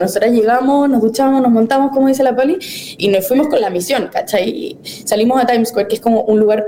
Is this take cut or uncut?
cut